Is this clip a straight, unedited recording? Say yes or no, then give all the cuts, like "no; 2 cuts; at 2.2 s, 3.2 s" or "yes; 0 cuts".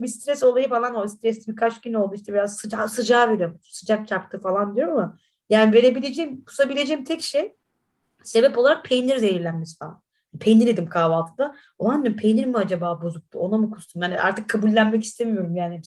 yes; 0 cuts